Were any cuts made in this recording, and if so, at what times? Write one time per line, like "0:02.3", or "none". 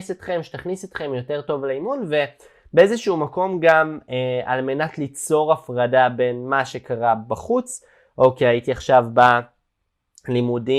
none